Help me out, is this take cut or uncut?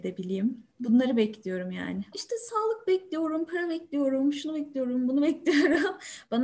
cut